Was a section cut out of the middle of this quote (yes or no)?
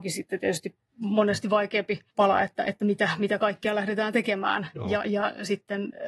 yes